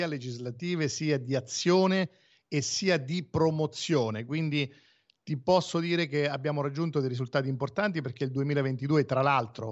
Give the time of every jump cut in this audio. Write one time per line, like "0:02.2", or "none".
none